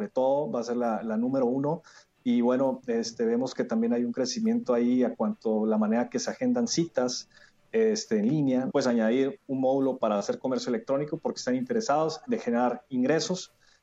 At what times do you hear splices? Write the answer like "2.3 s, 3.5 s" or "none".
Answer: 8.7 s, 12.2 s